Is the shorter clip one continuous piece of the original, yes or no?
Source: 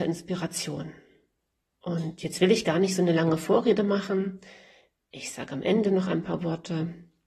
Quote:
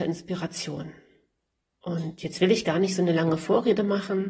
yes